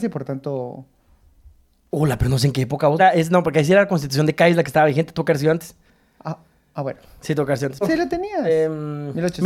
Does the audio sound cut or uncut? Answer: cut